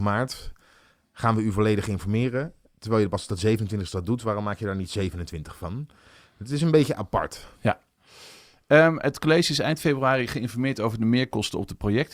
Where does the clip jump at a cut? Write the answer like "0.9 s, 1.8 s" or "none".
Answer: none